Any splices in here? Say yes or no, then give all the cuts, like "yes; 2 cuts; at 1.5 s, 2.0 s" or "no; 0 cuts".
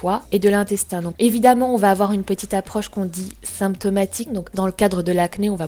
yes; 1 cut; at 4.3 s